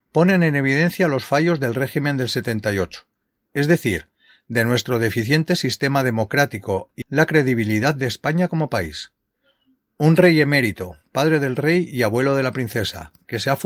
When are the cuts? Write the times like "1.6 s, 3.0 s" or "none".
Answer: 7.0 s